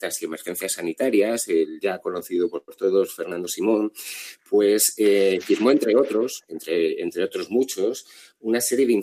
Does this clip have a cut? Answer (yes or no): no